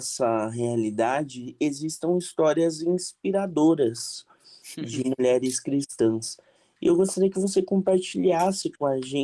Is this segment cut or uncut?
uncut